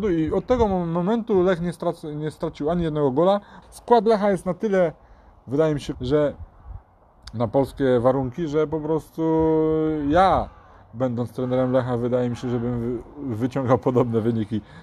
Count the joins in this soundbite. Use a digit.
2